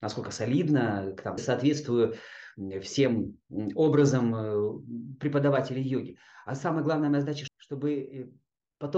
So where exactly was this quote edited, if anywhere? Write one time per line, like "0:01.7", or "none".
0:01.4
0:07.5